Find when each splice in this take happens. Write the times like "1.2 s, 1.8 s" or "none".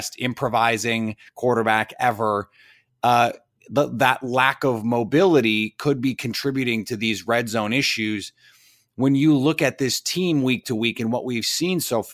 none